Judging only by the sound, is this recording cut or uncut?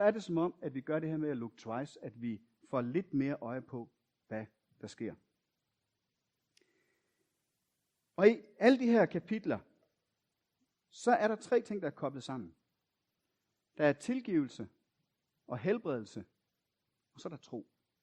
uncut